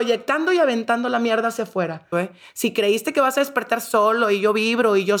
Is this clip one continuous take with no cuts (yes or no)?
no